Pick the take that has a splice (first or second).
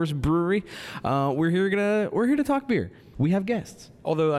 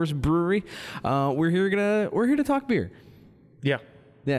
first